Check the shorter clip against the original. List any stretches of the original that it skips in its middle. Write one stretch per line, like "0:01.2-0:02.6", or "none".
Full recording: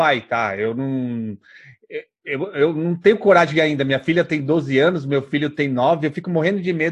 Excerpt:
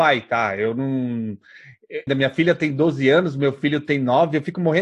0:02.1-0:03.8